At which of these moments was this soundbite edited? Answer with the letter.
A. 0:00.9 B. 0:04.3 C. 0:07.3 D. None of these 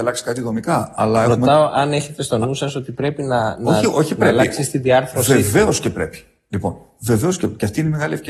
D